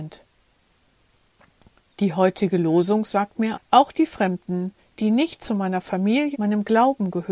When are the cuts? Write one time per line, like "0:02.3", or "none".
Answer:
0:03.5
0:04.9
0:06.3

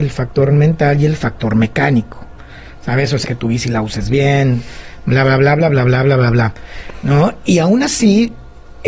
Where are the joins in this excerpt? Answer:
0:03.2

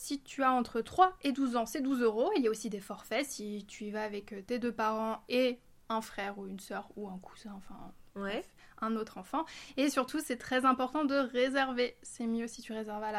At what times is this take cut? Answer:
none

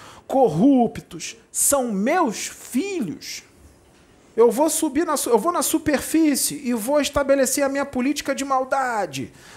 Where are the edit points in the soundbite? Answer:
0:04.3

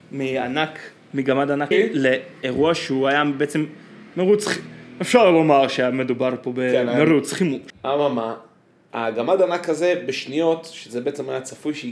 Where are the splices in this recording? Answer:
0:01.7
0:07.7

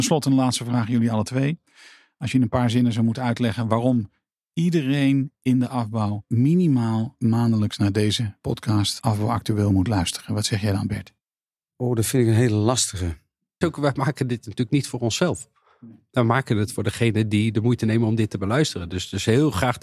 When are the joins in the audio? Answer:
0:13.6

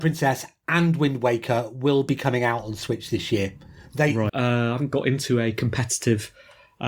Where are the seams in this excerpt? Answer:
0:04.3

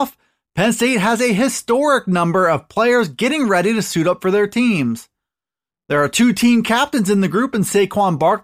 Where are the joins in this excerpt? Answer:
0:05.7

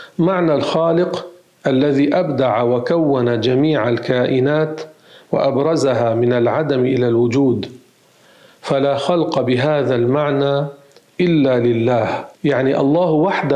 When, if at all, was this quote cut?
0:12.3

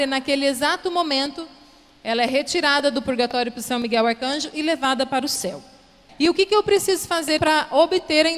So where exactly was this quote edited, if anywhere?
0:06.1
0:07.4

